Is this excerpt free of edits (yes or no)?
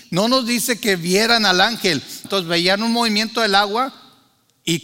no